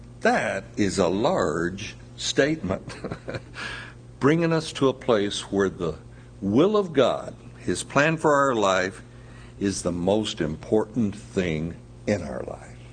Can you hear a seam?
yes; 1 cut; at 4.2 s

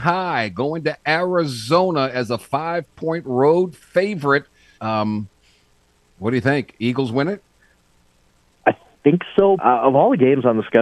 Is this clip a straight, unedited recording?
no; 2 cuts; at 4.8 s, 9.6 s

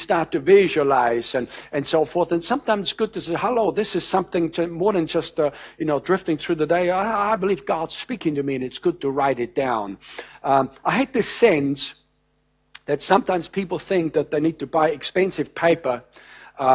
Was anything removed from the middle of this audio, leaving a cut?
no; 0 cuts

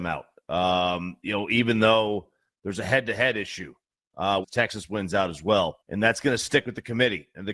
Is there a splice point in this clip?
yes; 2 cuts; at 4.4 s, 5.8 s

